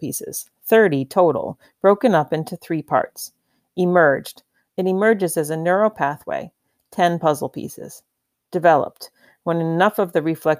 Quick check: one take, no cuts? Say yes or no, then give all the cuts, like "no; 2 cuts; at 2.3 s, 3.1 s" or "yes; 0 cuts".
no; 1 cut; at 4.7 s